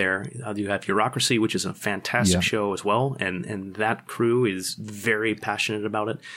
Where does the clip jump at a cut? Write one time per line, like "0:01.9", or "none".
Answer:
none